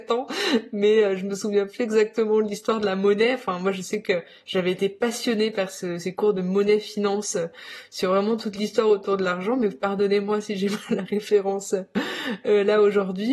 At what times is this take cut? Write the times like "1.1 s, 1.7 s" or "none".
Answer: none